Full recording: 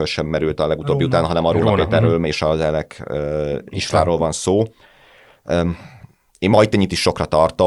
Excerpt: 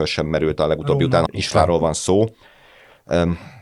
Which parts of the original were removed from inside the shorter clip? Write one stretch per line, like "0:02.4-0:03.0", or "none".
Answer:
0:01.3-0:03.6